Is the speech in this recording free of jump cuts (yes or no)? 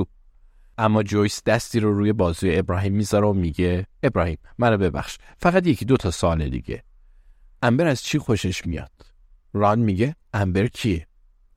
yes